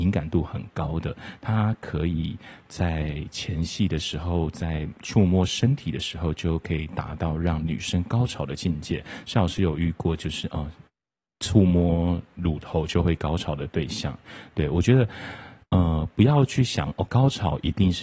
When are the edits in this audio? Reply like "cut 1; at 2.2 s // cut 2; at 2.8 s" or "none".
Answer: none